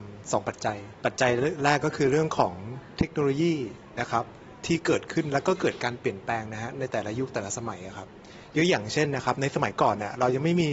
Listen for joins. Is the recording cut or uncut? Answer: cut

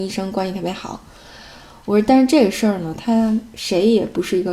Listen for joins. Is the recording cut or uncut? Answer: uncut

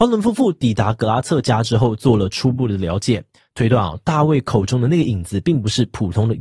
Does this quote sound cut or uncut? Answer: uncut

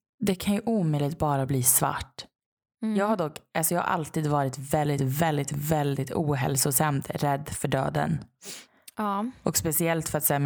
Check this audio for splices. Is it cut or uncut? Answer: uncut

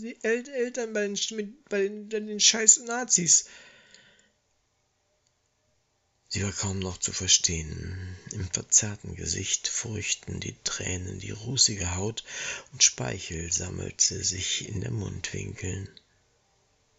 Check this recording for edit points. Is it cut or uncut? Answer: uncut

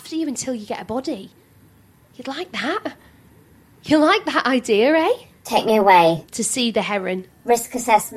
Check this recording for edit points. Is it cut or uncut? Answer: uncut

